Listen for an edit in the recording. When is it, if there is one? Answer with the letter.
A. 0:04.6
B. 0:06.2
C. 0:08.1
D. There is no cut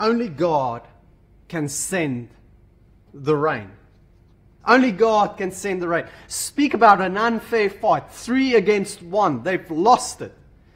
A